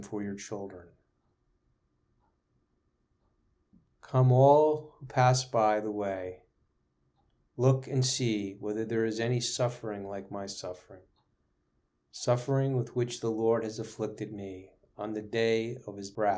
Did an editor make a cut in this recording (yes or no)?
no